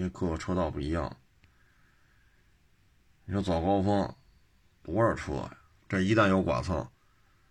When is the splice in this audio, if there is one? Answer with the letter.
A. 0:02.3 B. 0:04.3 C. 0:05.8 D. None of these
C